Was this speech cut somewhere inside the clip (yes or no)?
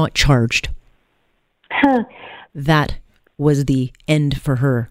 yes